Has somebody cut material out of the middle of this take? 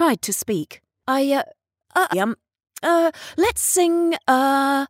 yes; 1 cut; at 2.1 s

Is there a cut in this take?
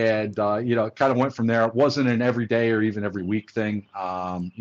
no; 0 cuts

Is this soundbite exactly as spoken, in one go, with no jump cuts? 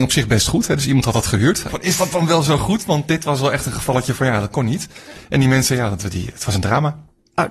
no; 1 cut; at 1.7 s

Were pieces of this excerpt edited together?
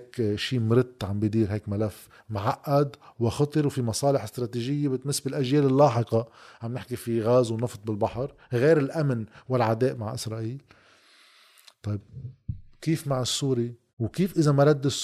yes; 1 cut; at 13.9 s

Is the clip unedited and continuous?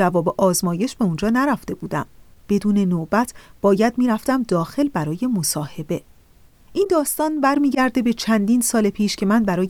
no; 1 cut; at 6.6 s

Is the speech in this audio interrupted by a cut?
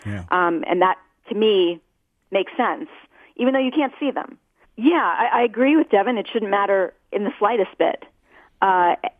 yes; 1 cut; at 4.6 s

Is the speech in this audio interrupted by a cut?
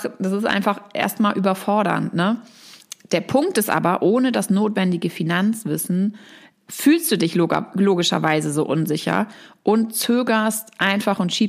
no; 0 cuts

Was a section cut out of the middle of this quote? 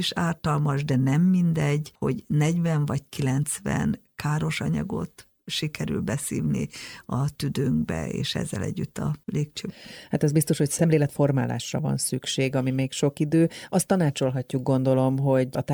no; 0 cuts

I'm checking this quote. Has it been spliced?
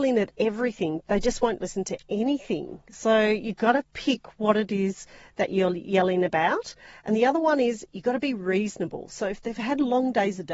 no; 0 cuts

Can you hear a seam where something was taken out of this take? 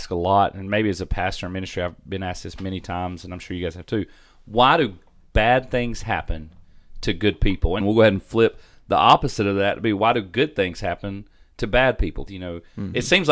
yes; 2 cuts; at 7.8 s, 12.3 s

